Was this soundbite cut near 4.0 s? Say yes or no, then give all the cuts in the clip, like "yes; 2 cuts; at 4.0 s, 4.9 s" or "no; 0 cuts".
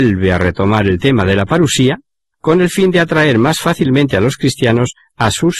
no; 1 cut; at 2.3 s